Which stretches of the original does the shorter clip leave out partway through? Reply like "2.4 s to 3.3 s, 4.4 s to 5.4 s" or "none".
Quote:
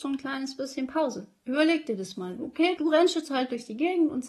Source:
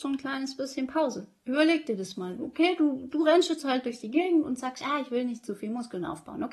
2.8 s to 3.1 s